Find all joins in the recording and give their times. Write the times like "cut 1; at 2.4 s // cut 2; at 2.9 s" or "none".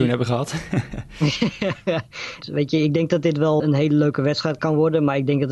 cut 1; at 2.4 s // cut 2; at 3.6 s